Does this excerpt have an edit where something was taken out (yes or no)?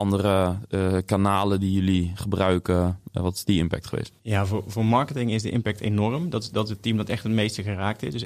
yes